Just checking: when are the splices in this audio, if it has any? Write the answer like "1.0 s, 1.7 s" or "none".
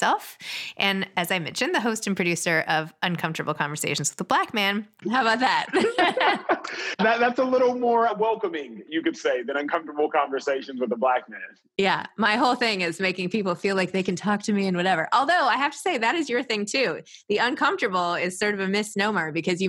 5.0 s